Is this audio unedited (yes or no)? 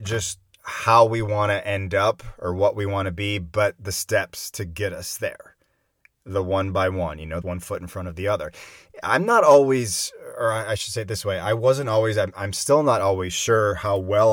no